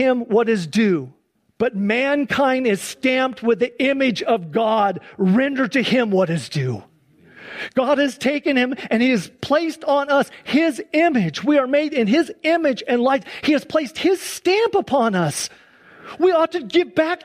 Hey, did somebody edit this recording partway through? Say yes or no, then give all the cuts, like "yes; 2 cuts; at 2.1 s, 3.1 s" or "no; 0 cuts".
no; 0 cuts